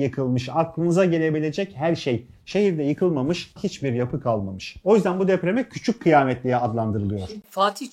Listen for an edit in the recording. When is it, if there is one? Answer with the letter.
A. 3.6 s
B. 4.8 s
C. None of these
A